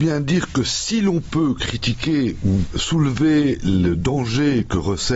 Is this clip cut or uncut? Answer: uncut